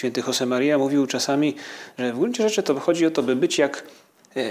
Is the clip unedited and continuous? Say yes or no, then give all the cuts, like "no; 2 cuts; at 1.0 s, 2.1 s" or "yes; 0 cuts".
yes; 0 cuts